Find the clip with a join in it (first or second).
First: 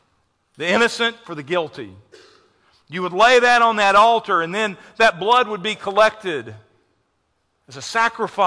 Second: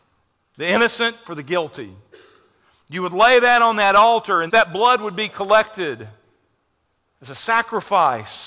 second